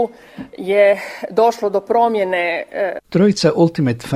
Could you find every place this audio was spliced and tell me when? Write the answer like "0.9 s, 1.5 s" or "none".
3.0 s